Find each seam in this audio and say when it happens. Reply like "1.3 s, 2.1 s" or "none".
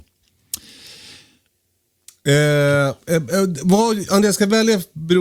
none